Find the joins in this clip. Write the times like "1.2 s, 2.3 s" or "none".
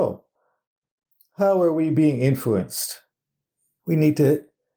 3.8 s